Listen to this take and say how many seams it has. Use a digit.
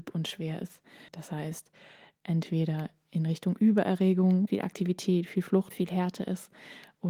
3